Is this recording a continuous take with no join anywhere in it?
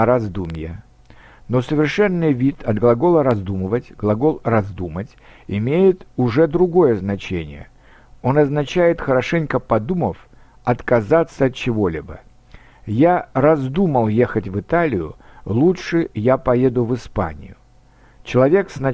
yes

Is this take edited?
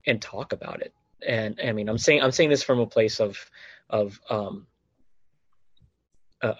yes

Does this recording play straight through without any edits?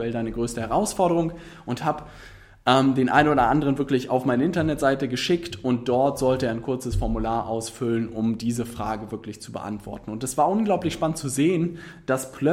yes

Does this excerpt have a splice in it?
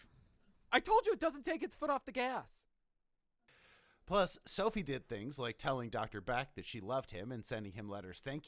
no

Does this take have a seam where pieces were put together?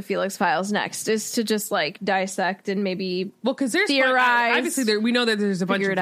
no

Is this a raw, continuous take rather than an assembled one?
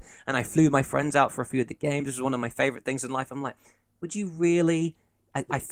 yes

